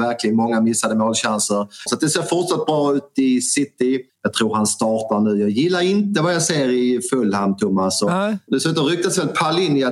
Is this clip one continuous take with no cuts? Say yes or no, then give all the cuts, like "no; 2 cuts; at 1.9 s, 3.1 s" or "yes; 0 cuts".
no; 3 cuts; at 1.9 s, 4.1 s, 8.5 s